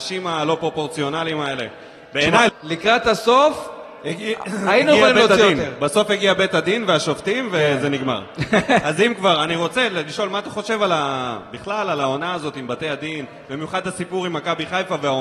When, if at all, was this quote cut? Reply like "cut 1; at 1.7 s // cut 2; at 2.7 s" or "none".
cut 1; at 2.5 s